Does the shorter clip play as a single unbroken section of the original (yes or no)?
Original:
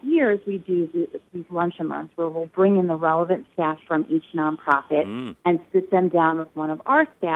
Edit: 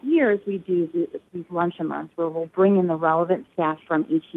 yes